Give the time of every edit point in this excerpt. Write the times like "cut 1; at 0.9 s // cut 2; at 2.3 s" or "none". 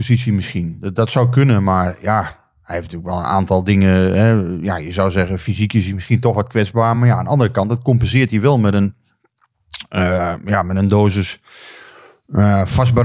none